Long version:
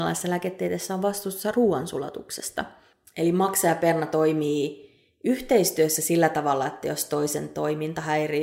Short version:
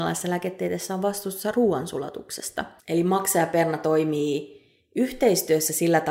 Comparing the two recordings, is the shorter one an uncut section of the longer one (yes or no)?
no